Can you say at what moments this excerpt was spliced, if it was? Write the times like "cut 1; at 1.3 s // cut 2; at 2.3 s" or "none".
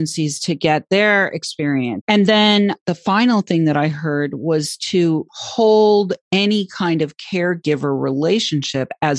cut 1; at 2.0 s // cut 2; at 5.3 s